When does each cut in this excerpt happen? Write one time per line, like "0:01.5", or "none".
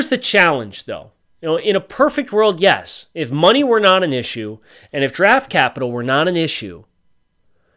none